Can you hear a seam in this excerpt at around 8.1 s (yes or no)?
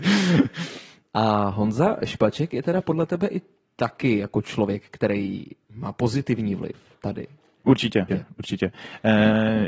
yes